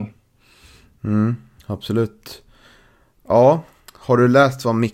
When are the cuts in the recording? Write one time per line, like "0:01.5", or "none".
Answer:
none